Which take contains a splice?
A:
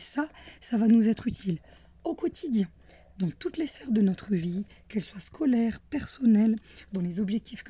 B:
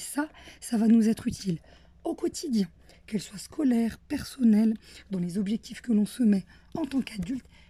B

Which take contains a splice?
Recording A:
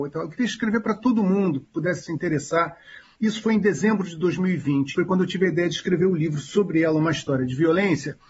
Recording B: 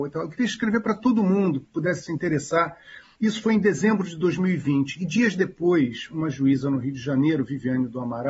A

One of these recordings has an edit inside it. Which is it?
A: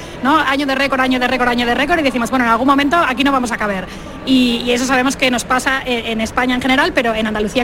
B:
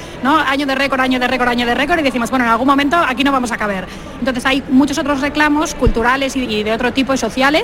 B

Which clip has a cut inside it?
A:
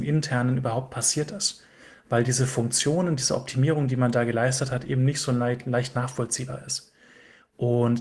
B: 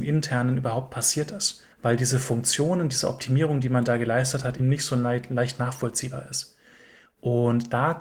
B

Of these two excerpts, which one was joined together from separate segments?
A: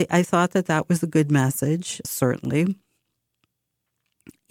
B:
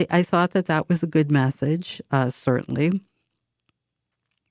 A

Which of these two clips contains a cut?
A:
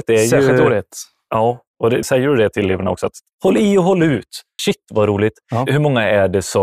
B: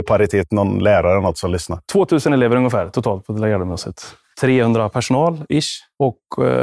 A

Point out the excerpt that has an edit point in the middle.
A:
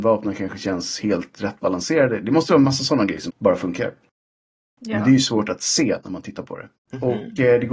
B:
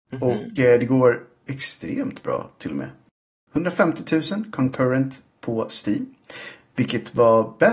A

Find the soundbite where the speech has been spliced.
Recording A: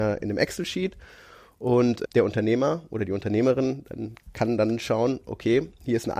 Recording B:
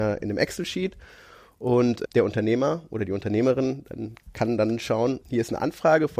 B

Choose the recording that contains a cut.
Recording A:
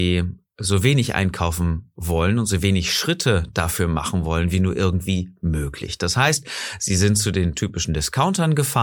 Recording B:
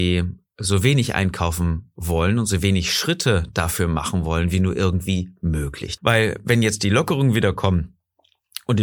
B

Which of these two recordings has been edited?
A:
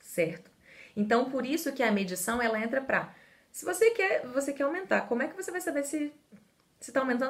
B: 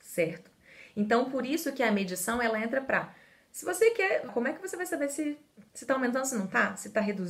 B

